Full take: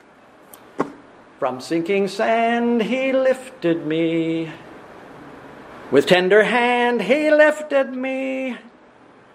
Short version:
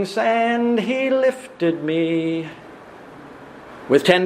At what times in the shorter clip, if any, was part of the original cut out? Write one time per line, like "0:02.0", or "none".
none